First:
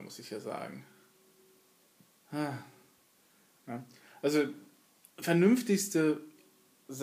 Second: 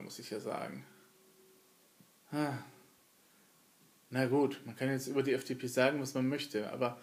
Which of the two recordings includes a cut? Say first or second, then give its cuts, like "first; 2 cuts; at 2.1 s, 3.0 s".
first; 1 cut; at 3.6 s